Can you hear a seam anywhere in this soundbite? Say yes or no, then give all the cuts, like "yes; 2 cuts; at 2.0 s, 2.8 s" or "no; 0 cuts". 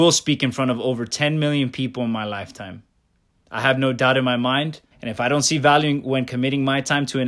yes; 1 cut; at 4.9 s